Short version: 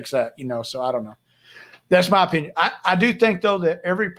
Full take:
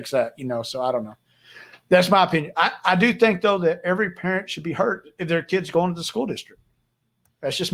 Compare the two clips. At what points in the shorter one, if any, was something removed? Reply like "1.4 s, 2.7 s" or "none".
none